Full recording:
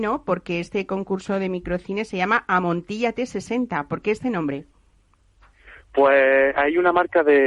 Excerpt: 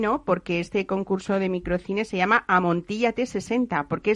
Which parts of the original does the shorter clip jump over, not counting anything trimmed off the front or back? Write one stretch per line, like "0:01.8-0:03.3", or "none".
none

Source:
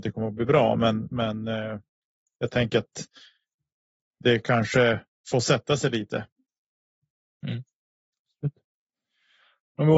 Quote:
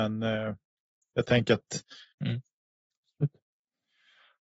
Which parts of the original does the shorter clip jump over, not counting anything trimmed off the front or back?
0:03.4-0:07.3

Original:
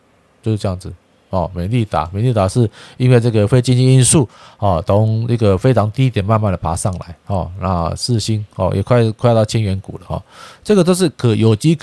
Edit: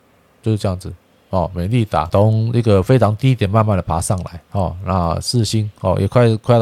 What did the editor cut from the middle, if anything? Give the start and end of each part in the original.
0:02.1-0:04.8

